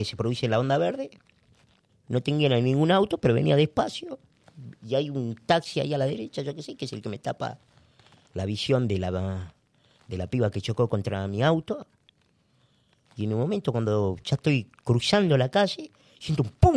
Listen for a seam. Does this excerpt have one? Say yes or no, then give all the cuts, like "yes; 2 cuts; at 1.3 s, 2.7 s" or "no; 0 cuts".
yes; 1 cut; at 1.9 s